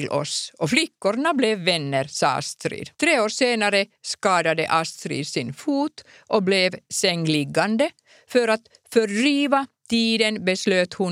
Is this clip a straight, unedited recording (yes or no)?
no